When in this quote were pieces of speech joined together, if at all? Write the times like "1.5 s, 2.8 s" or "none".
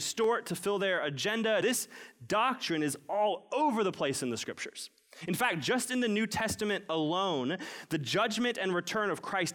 1.6 s